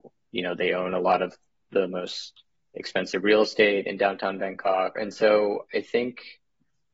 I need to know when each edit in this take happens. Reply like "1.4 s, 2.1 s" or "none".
4.9 s